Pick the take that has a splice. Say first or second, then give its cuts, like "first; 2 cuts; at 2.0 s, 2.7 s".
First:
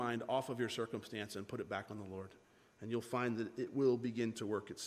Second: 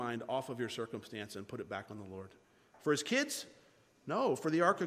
second; 1 cut; at 2.7 s